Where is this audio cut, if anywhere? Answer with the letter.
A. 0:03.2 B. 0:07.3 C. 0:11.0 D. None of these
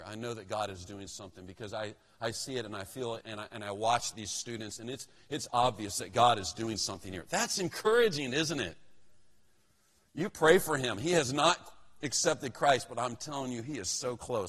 A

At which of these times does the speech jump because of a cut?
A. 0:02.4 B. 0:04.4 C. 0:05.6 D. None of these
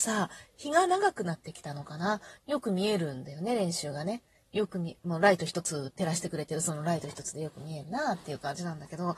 A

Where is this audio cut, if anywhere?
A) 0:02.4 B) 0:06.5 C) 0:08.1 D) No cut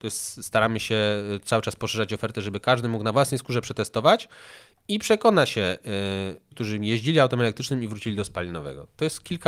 B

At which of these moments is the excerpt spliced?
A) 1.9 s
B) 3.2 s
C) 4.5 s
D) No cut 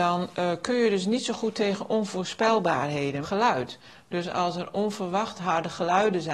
B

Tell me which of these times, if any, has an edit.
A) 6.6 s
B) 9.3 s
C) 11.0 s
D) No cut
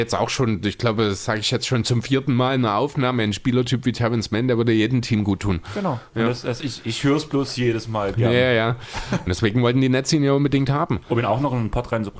B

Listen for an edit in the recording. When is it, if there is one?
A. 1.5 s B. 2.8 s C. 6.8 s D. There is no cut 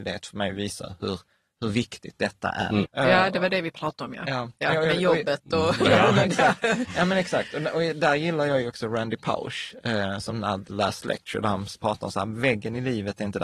B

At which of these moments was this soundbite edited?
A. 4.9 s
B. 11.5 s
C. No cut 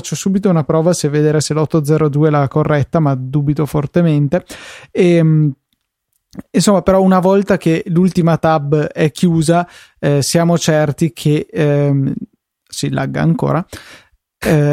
C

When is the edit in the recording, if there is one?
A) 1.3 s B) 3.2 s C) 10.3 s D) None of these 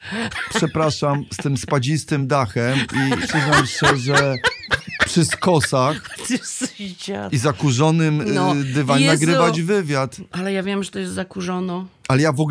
B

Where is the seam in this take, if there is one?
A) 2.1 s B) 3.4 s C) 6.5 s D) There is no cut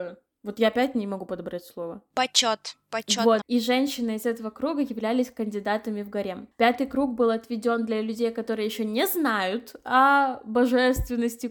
B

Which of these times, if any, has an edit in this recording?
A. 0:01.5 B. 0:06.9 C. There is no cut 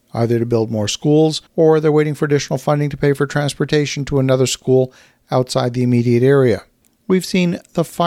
A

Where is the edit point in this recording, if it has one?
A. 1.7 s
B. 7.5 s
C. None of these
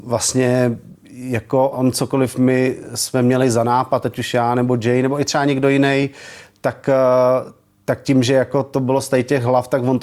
A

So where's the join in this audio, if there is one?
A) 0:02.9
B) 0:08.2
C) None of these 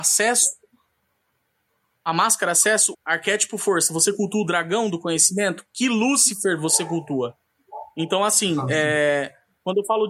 A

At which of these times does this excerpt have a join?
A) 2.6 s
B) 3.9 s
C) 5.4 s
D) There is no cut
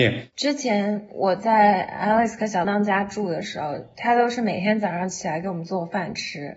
A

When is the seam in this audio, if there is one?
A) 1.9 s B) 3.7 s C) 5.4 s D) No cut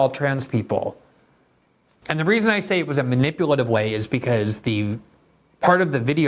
A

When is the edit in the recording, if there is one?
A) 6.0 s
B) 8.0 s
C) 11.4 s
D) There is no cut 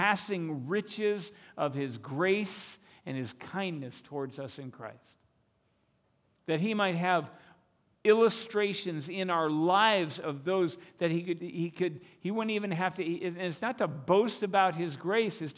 C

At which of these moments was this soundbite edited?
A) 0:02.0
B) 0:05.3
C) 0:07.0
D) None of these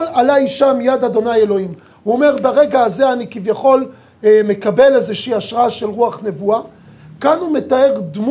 D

